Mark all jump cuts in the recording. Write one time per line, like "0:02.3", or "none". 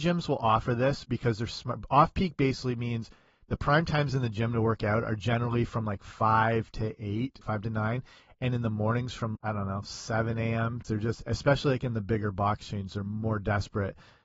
0:07.4
0:09.4
0:10.8